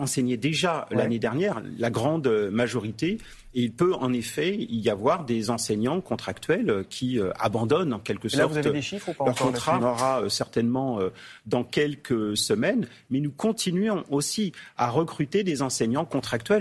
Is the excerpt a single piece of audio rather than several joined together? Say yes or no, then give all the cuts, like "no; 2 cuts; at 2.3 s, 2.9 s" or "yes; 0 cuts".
no; 1 cut; at 9.8 s